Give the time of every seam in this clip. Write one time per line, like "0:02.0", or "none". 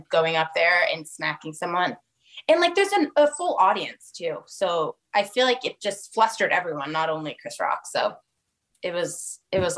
none